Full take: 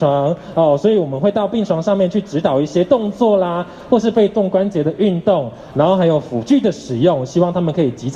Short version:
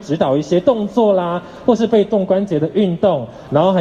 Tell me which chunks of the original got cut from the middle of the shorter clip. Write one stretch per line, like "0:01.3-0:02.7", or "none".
none